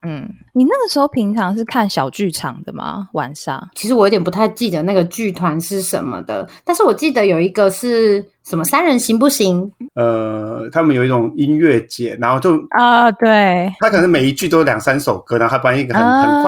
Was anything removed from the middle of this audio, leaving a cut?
yes; 1 cut; at 9.9 s

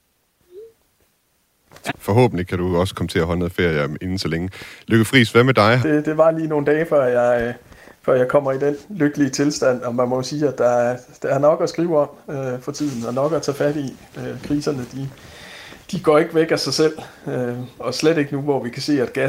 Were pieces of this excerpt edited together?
yes; 2 cuts; at 1.9 s, 5.8 s

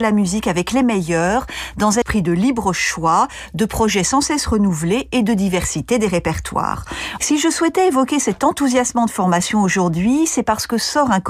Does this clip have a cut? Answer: yes; 2 cuts; at 2.0 s, 7.2 s

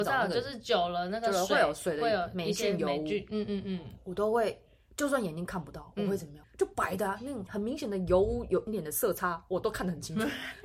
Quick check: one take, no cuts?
no; 3 cuts; at 6.4 s, 7.5 s, 8.7 s

